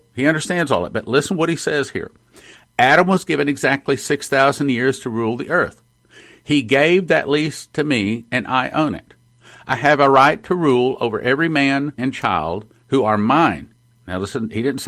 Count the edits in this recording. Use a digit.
1